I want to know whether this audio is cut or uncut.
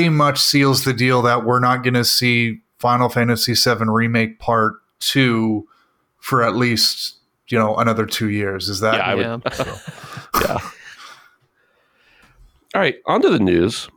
cut